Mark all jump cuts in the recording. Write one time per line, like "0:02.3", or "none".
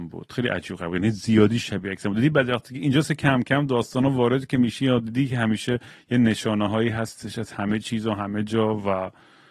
none